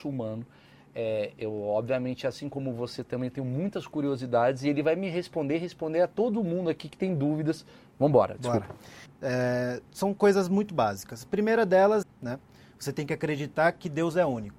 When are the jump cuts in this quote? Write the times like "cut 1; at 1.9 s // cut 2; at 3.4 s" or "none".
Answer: cut 1; at 9.1 s // cut 2; at 12.0 s